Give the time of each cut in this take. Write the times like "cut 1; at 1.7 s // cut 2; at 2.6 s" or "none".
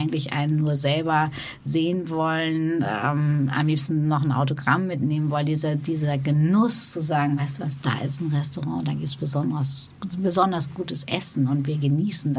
none